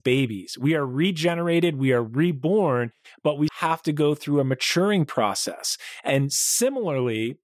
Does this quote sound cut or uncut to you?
cut